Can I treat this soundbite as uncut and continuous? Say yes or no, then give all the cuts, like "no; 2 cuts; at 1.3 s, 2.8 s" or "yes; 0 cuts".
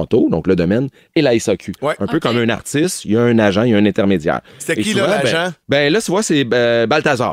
no; 1 cut; at 5.6 s